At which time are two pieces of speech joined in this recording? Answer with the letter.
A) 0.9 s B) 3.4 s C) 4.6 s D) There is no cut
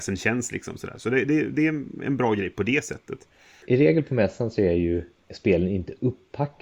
D